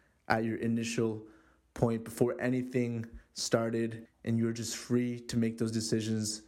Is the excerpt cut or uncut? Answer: cut